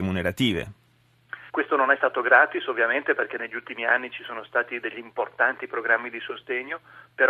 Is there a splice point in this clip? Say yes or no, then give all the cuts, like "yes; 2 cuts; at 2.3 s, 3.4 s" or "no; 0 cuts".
yes; 1 cut; at 1.5 s